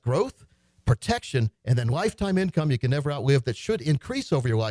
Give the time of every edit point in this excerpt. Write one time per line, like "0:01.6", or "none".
none